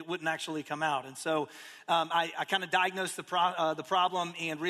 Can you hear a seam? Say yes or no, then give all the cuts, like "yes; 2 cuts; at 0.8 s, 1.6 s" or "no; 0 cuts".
no; 0 cuts